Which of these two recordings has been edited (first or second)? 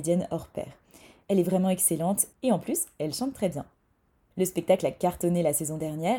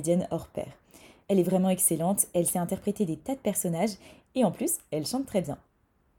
first